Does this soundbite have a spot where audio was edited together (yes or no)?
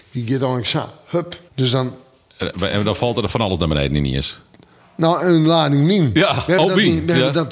yes